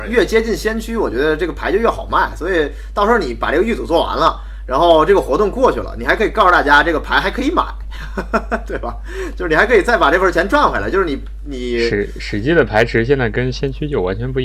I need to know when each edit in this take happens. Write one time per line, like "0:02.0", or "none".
none